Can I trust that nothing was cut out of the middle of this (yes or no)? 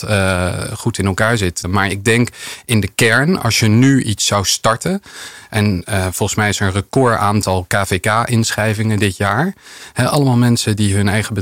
no